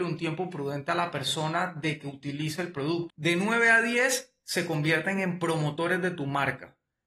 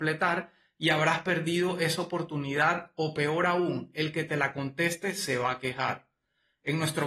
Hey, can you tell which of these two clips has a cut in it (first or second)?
first